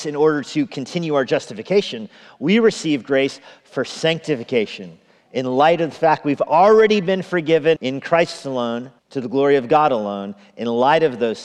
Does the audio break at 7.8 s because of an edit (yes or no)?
yes